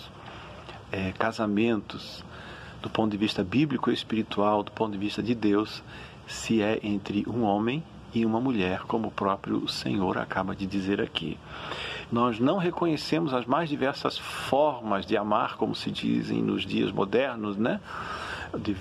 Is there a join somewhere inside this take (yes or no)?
yes